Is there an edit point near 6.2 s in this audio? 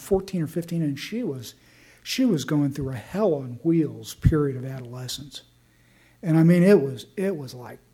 no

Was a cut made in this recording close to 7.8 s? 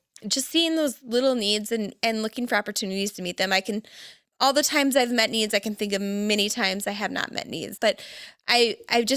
yes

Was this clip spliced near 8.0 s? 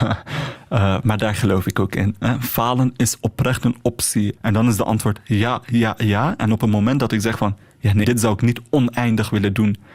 yes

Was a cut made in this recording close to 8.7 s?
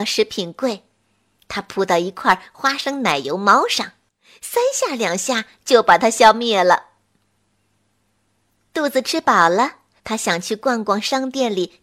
no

